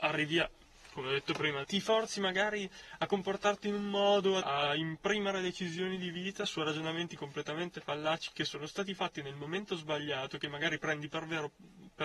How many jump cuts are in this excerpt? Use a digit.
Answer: 2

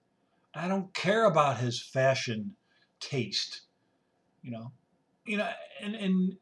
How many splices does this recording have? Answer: 1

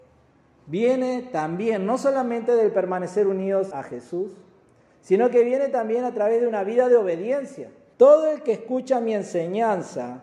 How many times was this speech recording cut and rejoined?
2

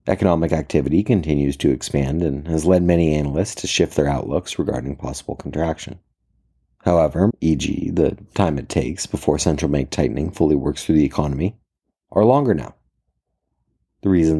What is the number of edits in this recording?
1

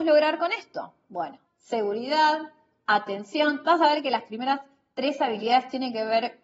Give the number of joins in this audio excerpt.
1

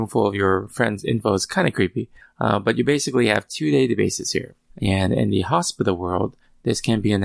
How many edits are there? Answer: 1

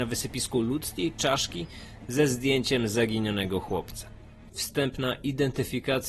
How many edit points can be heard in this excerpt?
1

